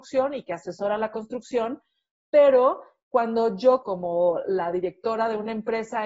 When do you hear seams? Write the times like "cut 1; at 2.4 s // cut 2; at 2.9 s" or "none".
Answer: cut 1; at 3.8 s